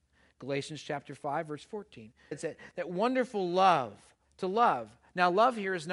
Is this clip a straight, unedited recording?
no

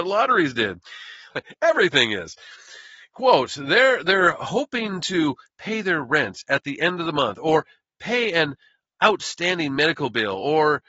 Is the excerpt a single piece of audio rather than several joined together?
no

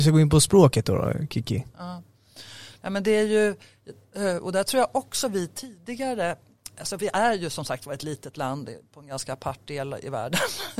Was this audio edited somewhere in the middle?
no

